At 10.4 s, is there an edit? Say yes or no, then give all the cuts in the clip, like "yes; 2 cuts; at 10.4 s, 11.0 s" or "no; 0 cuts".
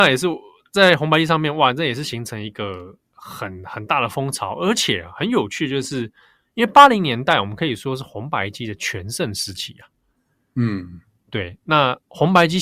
no; 1 cut; at 3.0 s